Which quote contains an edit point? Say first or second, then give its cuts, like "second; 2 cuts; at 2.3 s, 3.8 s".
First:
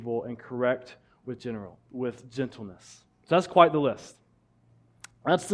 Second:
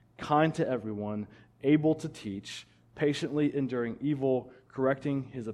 first; 1 cut; at 1.9 s